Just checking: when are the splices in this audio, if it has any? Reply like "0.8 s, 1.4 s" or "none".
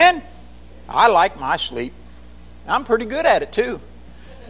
none